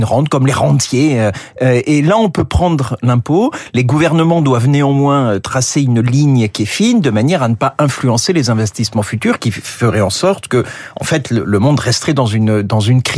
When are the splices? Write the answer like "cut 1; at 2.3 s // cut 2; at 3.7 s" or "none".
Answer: none